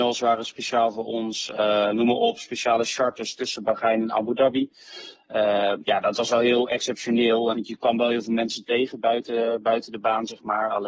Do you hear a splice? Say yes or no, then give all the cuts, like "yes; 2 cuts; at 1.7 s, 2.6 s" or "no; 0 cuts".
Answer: yes; 1 cut; at 7.5 s